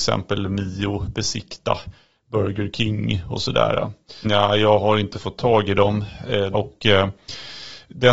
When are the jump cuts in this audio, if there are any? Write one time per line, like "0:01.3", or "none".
0:04.2
0:06.5